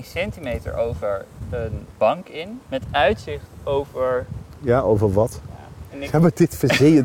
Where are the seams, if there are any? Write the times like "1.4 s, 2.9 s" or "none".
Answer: 5.9 s